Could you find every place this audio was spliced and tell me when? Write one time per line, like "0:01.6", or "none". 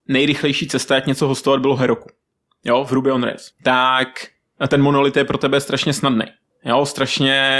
0:03.5